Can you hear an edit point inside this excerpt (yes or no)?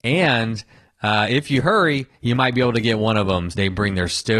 yes